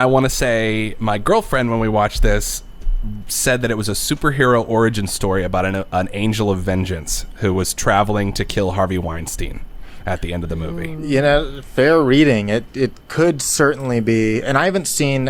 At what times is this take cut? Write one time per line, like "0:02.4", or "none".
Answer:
none